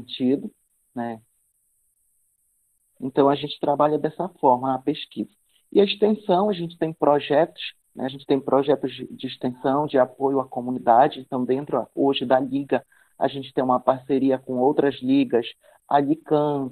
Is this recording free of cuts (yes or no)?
yes